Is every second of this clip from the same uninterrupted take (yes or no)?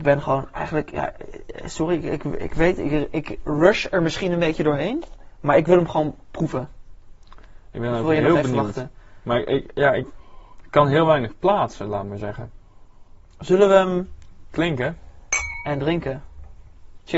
yes